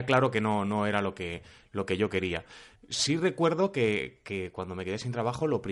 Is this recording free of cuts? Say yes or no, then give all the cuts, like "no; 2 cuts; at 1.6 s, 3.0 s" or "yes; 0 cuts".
yes; 0 cuts